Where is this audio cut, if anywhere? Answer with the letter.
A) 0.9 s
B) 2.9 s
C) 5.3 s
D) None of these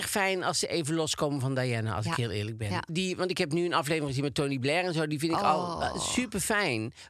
B